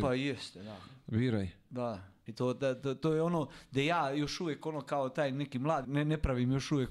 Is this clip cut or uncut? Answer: cut